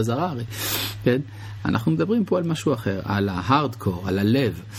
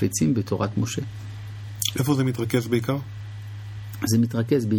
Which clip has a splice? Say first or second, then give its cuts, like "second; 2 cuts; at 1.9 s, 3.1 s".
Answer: first; 1 cut; at 1.6 s